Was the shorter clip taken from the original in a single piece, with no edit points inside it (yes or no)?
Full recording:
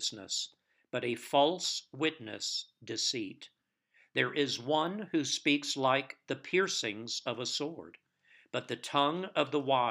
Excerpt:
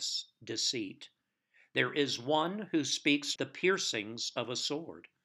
no